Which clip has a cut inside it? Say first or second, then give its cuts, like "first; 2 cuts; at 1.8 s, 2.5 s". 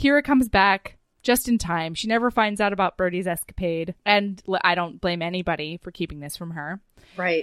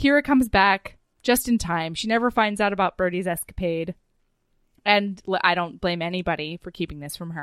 first; 1 cut; at 4.0 s